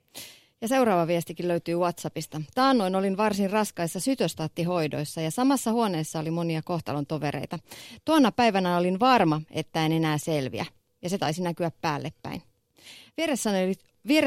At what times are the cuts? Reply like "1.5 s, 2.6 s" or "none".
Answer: none